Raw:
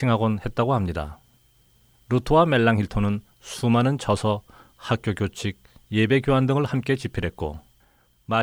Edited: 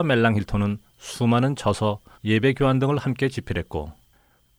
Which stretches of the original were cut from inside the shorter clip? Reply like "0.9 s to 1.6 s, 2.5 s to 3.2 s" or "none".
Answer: 4.6 s to 5.8 s